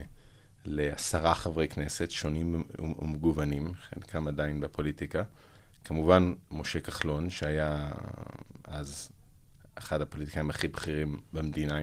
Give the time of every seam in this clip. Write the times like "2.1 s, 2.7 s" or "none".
none